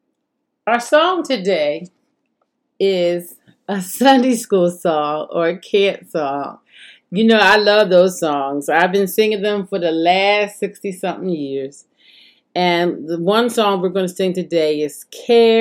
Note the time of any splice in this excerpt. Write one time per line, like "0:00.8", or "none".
none